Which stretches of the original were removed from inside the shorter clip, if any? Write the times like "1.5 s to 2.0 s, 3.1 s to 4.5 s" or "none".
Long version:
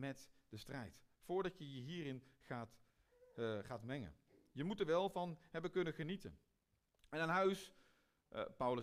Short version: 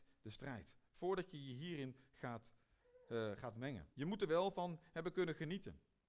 4.2 s to 4.5 s